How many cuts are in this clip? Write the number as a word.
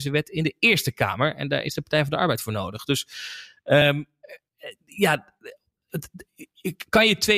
zero